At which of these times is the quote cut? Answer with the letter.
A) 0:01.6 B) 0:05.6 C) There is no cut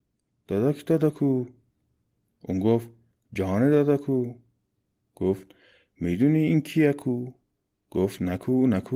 C